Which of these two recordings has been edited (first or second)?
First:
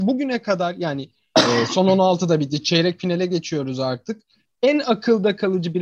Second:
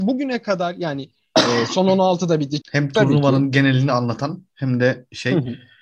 second